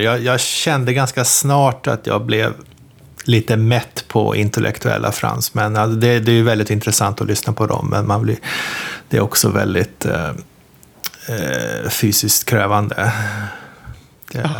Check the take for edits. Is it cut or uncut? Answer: uncut